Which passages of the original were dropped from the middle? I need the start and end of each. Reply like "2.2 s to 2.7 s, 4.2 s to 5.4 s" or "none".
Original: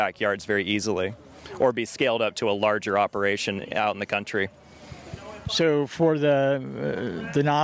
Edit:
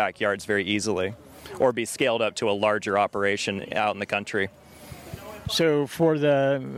none